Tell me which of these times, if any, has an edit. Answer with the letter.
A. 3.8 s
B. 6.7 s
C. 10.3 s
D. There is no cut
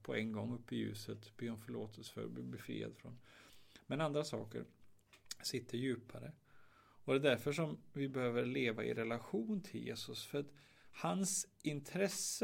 D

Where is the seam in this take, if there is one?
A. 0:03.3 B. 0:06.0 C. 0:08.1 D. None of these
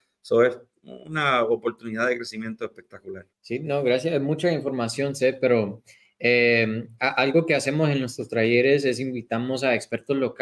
A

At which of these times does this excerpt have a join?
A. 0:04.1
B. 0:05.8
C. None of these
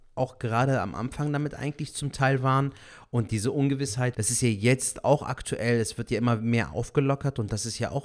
A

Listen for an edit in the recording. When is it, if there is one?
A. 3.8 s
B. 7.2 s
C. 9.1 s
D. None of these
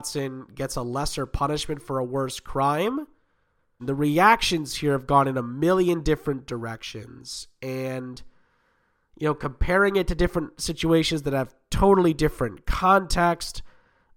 A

